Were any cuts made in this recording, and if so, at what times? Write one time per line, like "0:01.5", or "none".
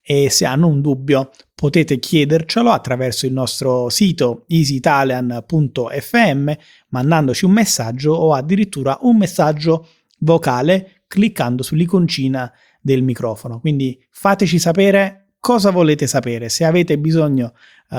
none